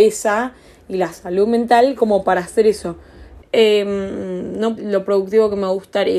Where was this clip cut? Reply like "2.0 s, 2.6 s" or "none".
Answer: 3.4 s, 4.8 s